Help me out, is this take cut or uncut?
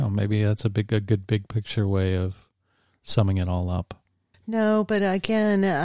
cut